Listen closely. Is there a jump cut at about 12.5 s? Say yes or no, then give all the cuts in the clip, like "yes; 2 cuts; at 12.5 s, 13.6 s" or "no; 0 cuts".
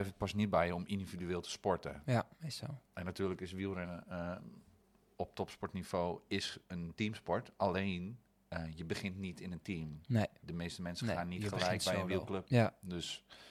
yes; 1 cut; at 12.5 s